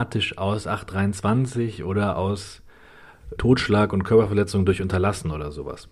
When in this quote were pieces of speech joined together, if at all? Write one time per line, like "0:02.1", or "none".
0:03.4